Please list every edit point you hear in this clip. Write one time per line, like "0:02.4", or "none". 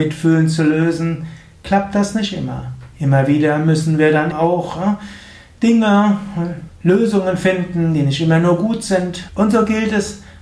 0:04.3
0:06.7
0:09.3

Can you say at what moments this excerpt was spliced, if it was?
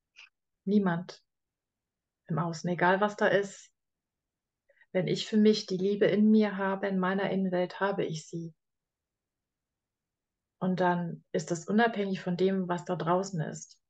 none

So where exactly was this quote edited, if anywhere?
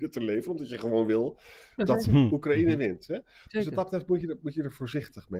none

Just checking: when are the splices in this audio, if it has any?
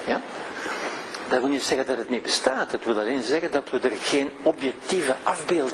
0:04.0

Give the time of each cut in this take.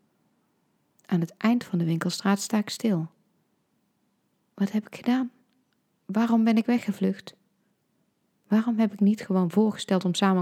none

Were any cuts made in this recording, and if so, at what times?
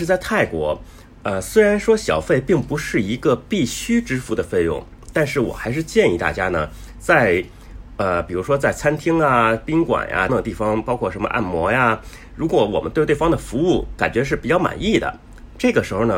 0:10.3

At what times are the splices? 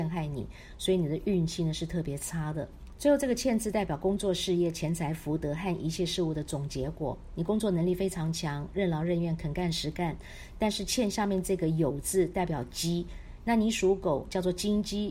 none

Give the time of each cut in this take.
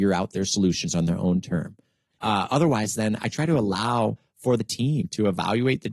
0:02.1

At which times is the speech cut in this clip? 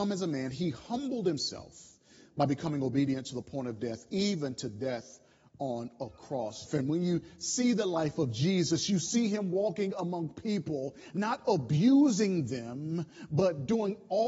0:06.7
0:11.1

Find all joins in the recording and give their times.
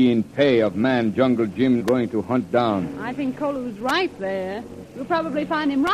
0:01.8
0:04.8

